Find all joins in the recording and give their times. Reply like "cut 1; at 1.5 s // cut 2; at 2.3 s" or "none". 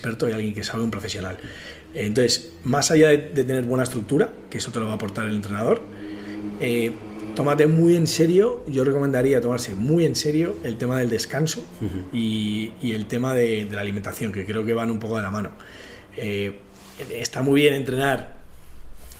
none